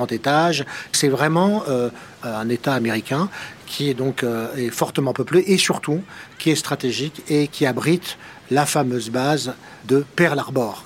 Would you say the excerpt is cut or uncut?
uncut